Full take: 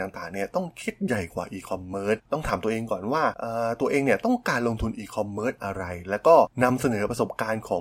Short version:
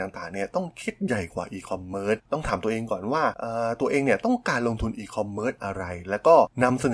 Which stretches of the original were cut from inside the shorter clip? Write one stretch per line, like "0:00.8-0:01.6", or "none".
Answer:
none